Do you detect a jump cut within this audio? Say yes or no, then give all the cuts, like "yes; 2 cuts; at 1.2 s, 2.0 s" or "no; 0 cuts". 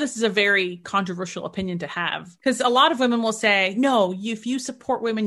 no; 0 cuts